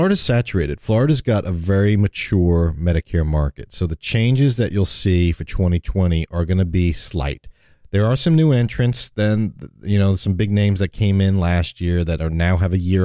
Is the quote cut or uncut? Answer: uncut